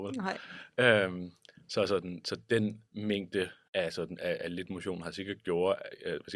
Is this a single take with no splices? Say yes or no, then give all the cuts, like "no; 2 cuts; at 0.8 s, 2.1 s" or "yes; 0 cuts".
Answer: no; 1 cut; at 2.8 s